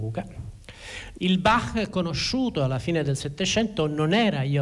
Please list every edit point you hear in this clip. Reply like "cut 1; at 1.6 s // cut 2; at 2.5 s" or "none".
cut 1; at 1.2 s